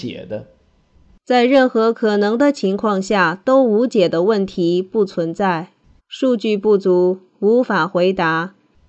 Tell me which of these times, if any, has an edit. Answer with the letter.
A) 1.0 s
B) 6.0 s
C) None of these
B